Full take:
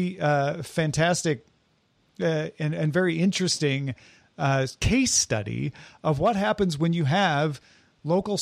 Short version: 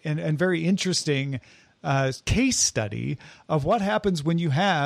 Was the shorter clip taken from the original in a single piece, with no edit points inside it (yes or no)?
yes